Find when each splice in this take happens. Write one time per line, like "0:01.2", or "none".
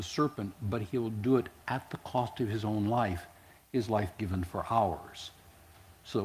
none